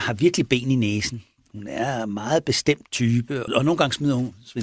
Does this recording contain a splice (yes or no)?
yes